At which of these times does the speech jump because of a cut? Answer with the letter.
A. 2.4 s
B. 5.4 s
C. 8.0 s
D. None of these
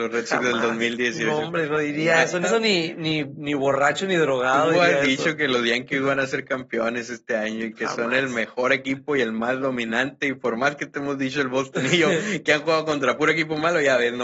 A